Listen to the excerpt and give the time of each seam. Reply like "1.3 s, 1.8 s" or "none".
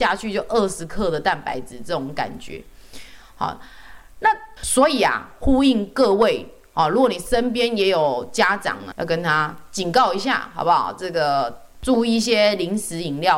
4.6 s, 8.9 s